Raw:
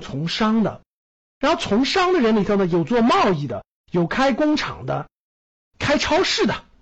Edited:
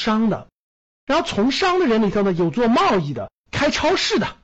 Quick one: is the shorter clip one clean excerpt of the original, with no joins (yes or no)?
no